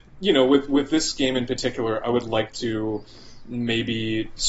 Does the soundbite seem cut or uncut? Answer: uncut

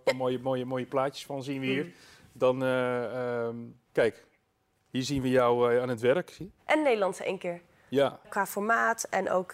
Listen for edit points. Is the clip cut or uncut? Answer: cut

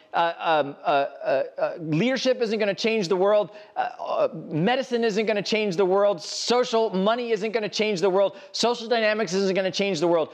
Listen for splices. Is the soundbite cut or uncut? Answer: uncut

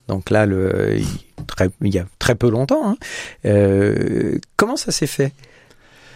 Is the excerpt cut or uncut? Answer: uncut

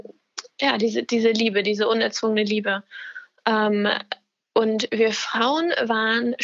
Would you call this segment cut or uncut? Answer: uncut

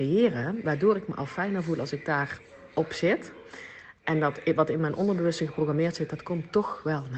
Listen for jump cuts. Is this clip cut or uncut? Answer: uncut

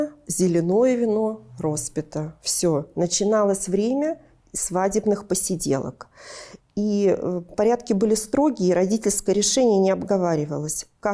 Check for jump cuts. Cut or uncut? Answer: cut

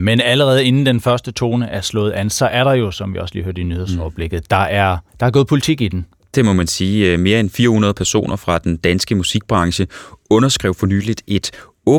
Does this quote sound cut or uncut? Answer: cut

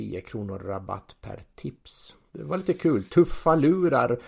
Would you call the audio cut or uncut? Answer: cut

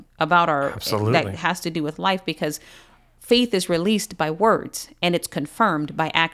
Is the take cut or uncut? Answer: uncut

